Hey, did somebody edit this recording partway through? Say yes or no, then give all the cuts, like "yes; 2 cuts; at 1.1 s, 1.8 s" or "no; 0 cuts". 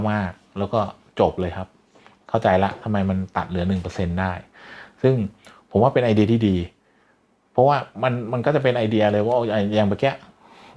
no; 0 cuts